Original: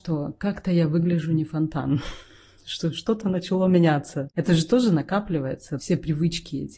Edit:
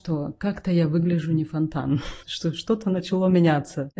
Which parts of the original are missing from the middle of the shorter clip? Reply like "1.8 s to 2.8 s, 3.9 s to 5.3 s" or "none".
2.2 s to 2.6 s